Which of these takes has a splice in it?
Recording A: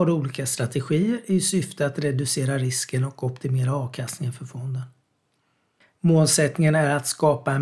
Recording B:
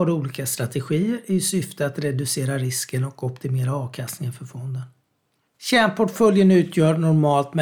B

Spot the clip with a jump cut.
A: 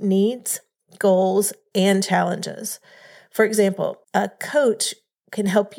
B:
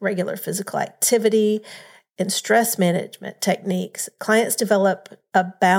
A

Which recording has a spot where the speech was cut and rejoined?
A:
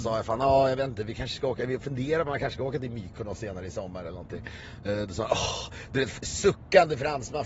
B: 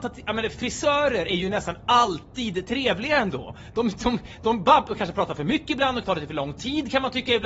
B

